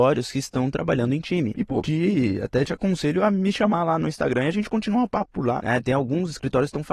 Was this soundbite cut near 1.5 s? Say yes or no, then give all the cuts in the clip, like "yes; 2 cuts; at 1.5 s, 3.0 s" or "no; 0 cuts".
yes; 2 cuts; at 1.5 s, 5.6 s